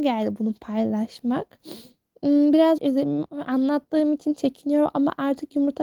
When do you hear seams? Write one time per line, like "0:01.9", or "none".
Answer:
0:02.8